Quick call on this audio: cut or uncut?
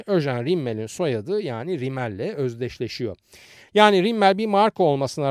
cut